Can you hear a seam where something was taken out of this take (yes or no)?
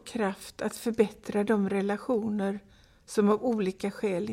no